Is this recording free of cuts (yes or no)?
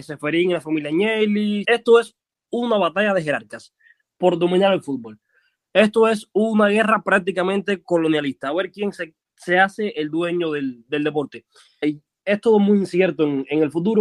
no